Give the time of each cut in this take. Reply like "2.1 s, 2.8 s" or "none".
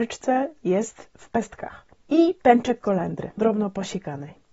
3.4 s

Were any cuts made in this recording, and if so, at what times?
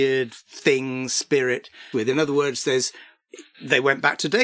1.9 s

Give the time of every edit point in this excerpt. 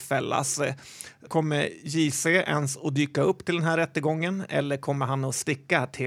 1.3 s

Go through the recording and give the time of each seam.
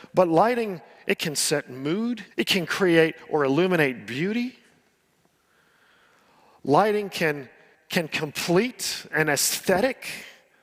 2.3 s, 7.7 s

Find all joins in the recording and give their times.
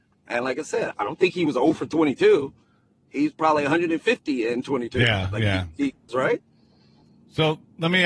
0.9 s, 6.1 s

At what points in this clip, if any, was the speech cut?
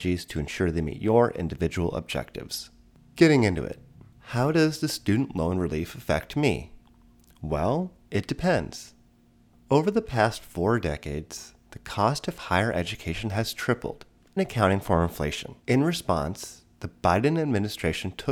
14.4 s, 15.6 s

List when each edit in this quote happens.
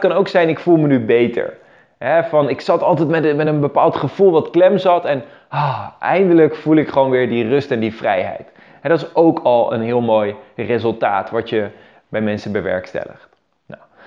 none

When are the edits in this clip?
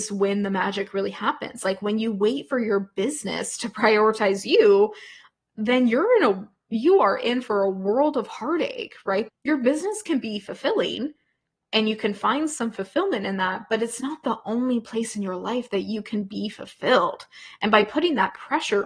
9.3 s

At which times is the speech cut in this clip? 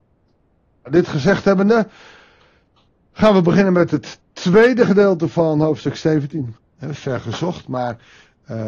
6.6 s

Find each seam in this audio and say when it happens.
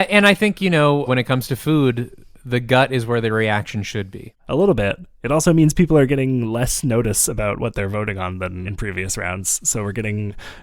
1.1 s, 4.4 s, 8.7 s

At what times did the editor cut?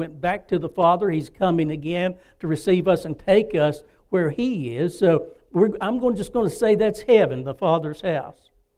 none

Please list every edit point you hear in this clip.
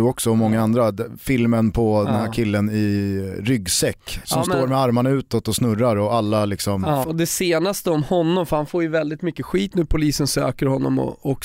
7.0 s

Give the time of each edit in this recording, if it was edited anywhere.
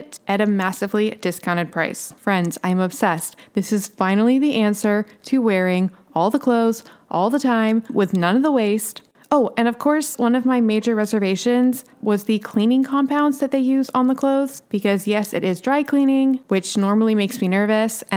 none

